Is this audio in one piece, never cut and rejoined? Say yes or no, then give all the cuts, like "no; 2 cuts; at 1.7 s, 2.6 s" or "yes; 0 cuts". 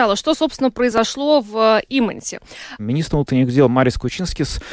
no; 1 cut; at 2.8 s